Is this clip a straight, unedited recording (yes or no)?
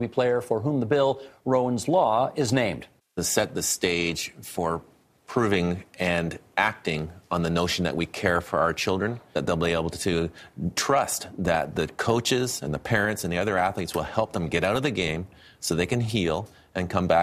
yes